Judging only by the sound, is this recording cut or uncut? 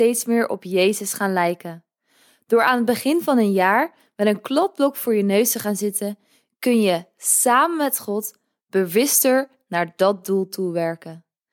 uncut